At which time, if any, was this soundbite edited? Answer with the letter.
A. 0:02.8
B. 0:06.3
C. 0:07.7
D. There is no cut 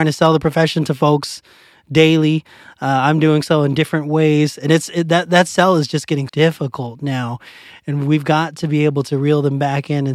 B